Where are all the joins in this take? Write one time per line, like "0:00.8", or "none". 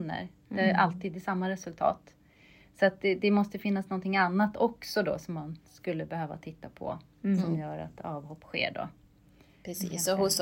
none